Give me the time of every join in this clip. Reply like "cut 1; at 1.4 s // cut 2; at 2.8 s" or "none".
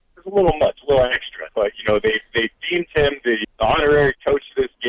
cut 1; at 1.5 s // cut 2; at 3.4 s